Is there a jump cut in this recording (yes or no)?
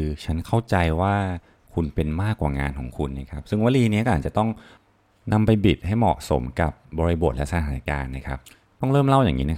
no